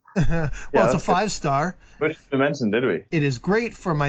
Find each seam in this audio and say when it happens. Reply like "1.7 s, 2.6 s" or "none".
2.0 s, 3.1 s